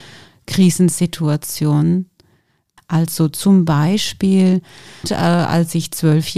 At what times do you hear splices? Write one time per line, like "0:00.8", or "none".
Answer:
0:02.8
0:05.0